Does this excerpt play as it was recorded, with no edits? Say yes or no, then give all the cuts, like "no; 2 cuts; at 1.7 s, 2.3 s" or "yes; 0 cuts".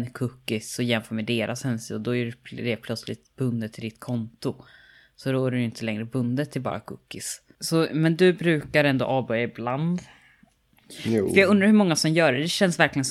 yes; 0 cuts